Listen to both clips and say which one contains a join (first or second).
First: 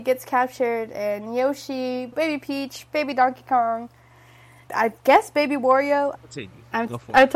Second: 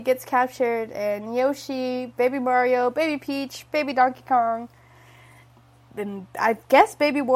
first